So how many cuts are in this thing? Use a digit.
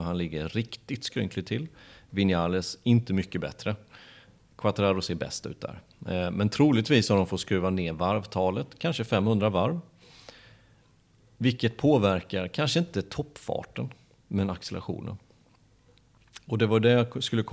0